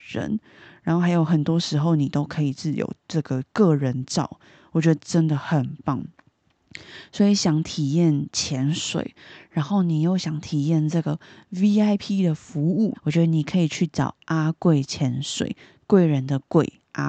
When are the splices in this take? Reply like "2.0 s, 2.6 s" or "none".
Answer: 12.9 s